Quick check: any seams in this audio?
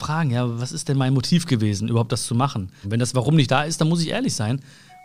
yes; 1 cut; at 2.8 s

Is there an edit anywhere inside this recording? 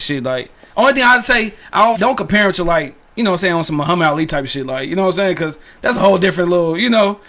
yes; 1 cut; at 1.9 s

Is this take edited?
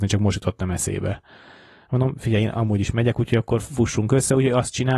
no; 0 cuts

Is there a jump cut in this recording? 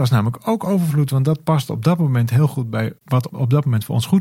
no; 0 cuts

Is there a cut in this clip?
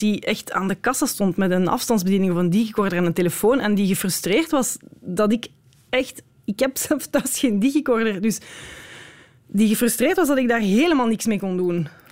no; 0 cuts

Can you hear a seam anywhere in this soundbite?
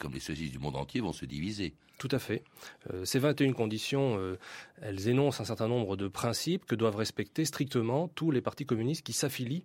no; 0 cuts

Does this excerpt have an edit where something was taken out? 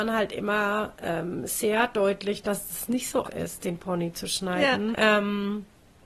yes; 2 cuts; at 3.2 s, 4.9 s

